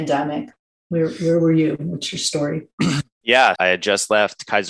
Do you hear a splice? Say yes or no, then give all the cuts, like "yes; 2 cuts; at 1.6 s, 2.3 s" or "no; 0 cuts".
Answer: yes; 1 cut; at 3.6 s